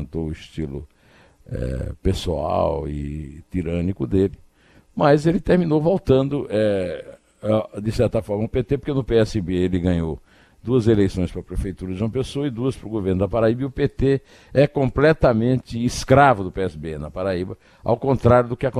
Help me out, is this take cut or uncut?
uncut